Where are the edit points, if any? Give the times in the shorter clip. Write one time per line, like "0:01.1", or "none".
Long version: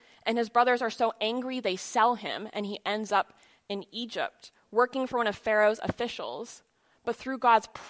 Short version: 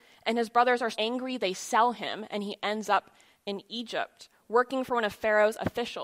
0:00.9

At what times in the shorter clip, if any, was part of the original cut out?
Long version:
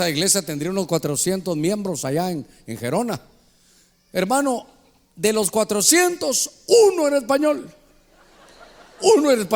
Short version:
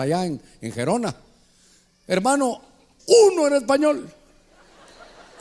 0:03.0

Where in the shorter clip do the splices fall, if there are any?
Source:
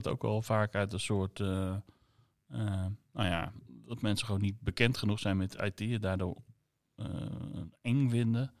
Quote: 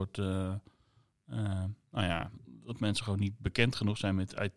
none

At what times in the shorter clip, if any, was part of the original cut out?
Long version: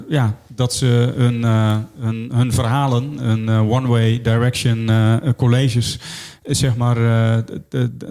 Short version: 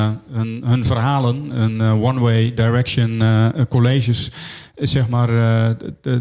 none

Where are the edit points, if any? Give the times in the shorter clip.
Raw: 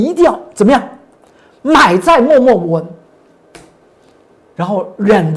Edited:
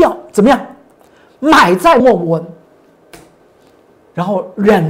0:02.0

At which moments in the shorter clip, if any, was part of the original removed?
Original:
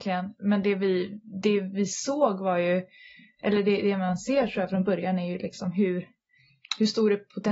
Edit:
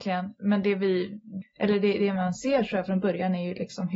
0:01.4

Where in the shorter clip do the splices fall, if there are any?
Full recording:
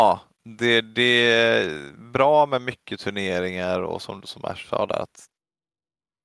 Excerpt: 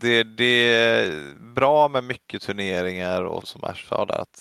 0:03.4

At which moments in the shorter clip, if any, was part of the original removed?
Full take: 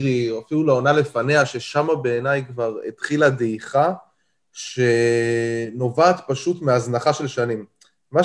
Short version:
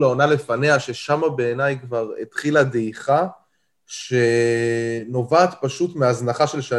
none

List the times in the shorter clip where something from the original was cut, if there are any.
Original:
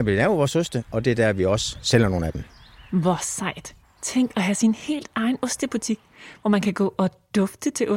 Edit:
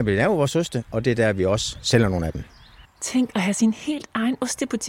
0:02.8

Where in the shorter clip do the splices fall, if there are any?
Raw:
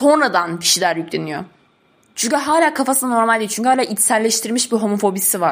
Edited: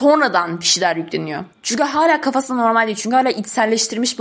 0:01.5

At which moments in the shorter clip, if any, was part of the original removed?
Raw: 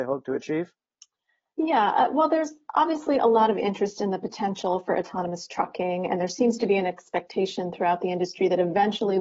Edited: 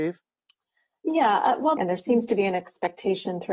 0:01.8

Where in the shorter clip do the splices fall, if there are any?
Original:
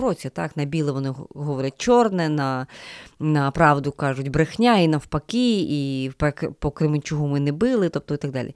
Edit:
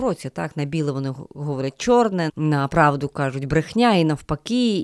0:02.3

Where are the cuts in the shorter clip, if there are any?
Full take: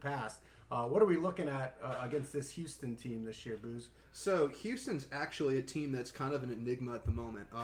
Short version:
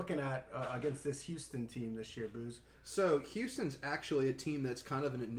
none

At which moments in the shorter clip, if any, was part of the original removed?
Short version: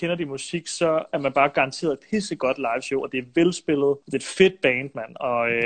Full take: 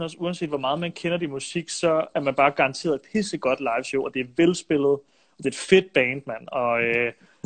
0:04.0

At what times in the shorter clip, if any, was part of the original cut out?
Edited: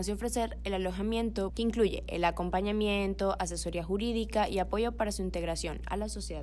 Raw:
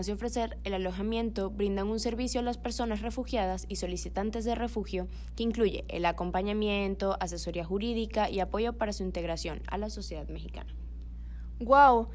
0:01.5

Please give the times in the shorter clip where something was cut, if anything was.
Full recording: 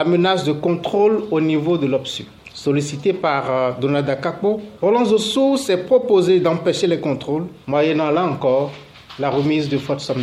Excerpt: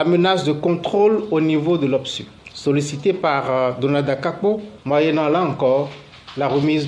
0:04.8

